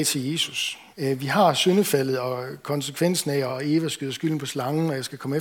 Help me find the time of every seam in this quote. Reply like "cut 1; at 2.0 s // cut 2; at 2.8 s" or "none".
cut 1; at 0.9 s // cut 2; at 3.5 s